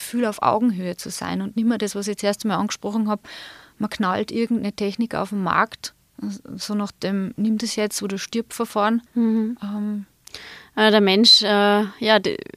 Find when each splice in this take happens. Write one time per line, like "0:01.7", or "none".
0:09.1